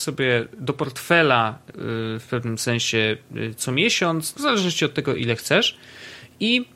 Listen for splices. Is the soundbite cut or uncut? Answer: cut